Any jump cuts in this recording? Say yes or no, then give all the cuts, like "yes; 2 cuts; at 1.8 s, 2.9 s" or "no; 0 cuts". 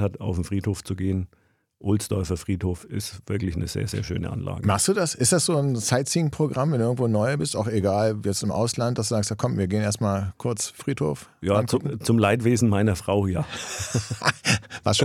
no; 0 cuts